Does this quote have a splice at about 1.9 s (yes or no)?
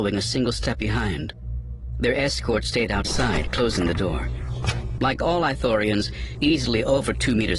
no